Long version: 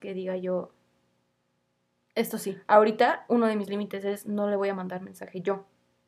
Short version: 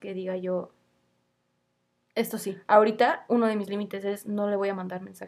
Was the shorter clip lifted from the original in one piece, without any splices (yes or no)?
yes